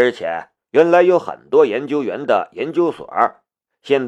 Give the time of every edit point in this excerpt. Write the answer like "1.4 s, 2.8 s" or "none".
none